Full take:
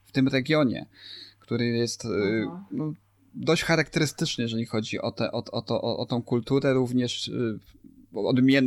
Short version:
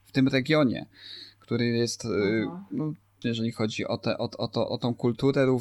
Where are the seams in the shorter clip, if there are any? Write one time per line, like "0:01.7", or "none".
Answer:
0:03.2
0:04.7